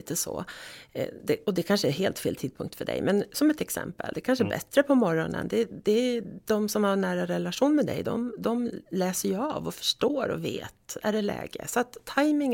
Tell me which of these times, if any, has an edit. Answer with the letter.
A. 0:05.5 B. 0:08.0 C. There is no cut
C